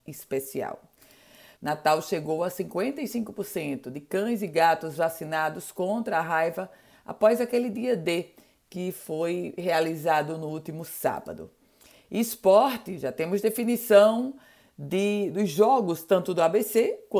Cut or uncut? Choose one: cut